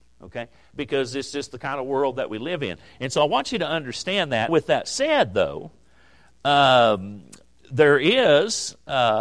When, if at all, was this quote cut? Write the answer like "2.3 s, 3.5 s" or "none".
4.5 s

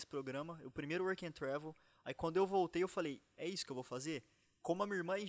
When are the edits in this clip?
none

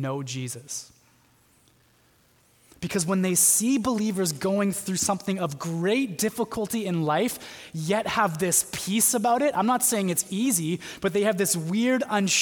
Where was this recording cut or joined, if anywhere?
none

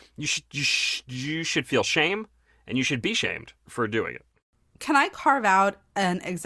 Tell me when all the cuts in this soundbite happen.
3.7 s

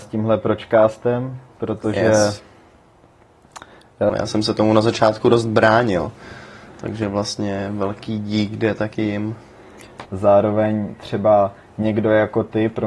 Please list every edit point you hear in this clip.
4.1 s, 10.0 s

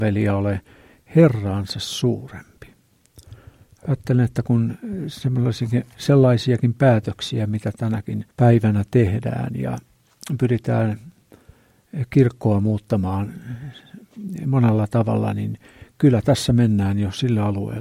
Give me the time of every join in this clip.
8.3 s

